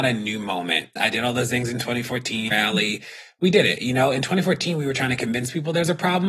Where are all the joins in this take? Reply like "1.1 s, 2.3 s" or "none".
1.0 s, 2.5 s